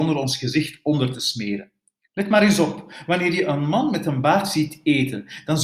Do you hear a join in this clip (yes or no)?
yes